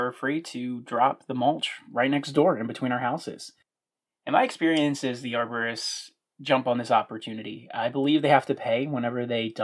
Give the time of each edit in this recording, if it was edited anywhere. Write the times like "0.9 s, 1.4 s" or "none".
none